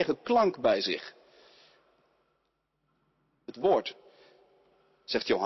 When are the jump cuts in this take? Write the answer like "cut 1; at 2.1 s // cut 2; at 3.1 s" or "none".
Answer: cut 1; at 3.4 s